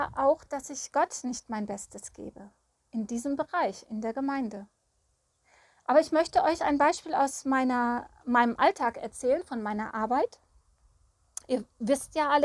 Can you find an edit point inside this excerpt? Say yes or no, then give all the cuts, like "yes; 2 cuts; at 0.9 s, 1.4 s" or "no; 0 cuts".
no; 0 cuts